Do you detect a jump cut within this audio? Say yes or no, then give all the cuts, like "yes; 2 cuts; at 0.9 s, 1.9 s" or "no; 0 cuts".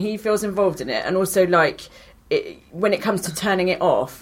no; 0 cuts